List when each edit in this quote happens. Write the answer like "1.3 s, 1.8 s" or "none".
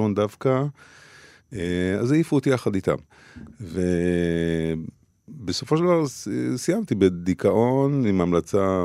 6.9 s